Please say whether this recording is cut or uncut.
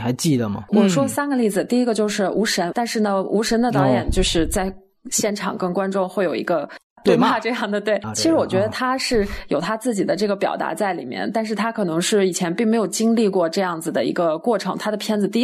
cut